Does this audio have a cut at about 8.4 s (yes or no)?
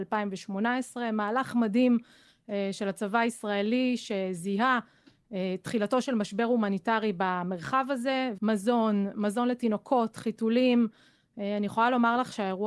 yes